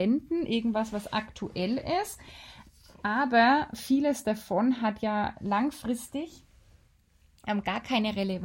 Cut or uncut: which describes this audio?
uncut